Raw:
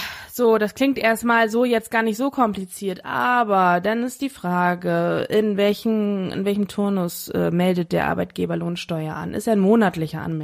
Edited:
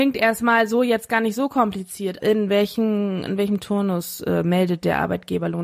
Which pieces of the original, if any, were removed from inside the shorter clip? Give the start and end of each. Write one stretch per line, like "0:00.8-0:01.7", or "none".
0:03.0-0:05.3